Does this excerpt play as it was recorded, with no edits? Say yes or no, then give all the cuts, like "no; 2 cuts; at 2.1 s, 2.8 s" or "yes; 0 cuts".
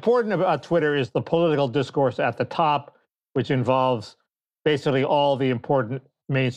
yes; 0 cuts